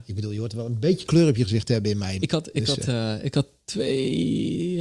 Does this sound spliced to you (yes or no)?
yes